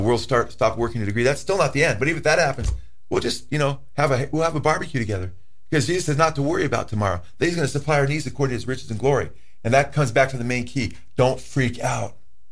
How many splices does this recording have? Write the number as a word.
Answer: zero